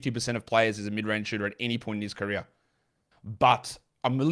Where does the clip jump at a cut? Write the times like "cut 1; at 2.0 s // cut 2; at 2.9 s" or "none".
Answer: cut 1; at 3.1 s